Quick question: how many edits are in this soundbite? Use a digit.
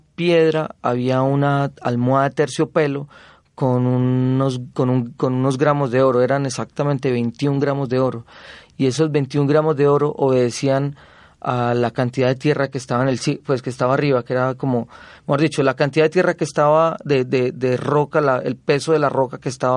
0